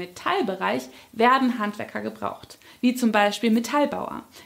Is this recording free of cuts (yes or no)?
yes